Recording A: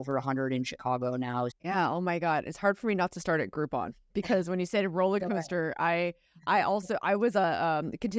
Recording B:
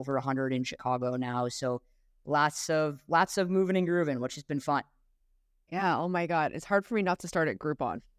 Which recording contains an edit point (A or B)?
A